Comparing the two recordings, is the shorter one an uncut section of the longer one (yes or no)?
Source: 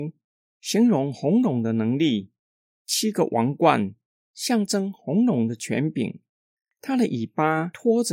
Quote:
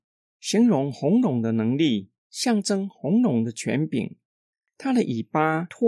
no